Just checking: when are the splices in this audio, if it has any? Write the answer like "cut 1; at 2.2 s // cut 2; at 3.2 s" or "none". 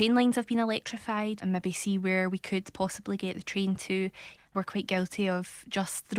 cut 1; at 1.4 s // cut 2; at 4.4 s